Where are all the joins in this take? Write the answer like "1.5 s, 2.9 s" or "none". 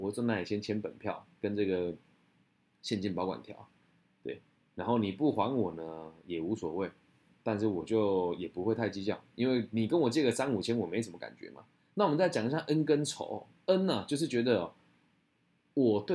11.9 s